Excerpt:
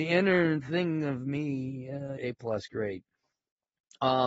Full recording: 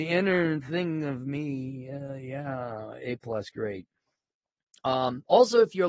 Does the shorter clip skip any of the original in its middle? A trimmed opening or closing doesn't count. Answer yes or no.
yes